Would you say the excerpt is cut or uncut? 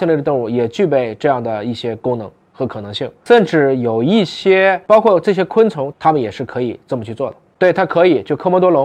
cut